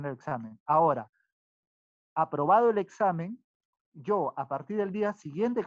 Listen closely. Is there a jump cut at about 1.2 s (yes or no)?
no